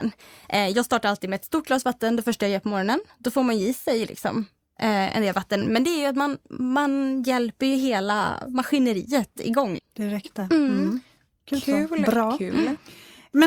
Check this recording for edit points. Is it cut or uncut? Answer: cut